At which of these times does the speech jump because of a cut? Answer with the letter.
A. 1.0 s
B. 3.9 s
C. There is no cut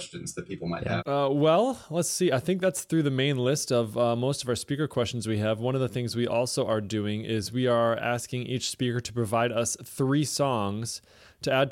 A